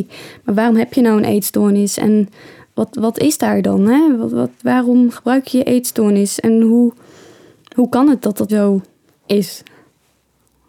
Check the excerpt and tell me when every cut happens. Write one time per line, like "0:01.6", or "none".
0:08.5